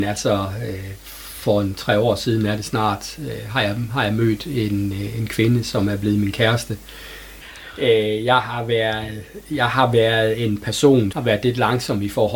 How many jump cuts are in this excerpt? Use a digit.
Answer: 2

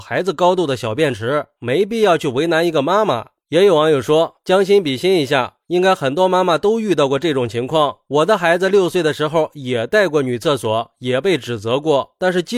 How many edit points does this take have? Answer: 1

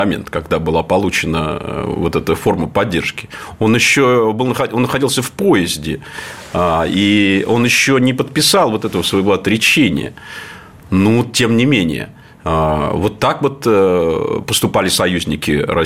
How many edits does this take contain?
0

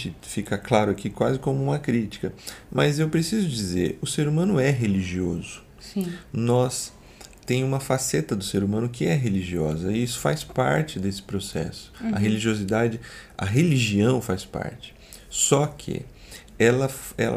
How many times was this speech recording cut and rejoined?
0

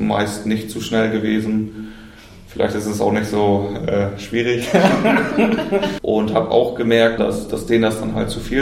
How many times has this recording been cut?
2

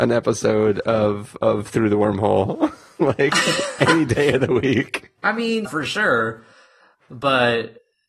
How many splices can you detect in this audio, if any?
1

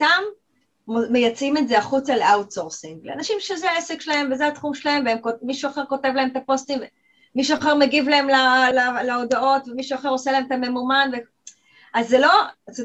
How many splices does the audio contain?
1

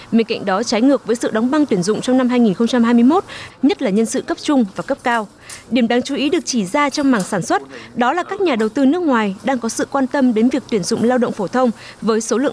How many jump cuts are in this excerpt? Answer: 1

